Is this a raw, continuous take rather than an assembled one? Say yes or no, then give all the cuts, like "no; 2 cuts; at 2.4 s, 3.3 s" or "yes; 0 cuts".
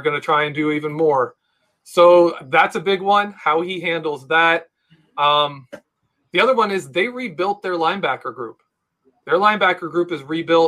yes; 0 cuts